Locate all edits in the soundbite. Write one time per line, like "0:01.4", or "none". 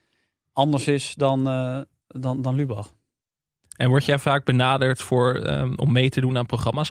none